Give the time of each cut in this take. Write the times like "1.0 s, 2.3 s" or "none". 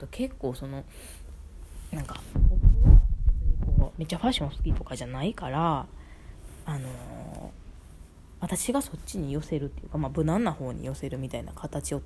none